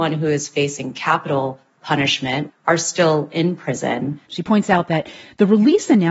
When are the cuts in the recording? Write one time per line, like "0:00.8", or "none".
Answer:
0:02.5
0:04.3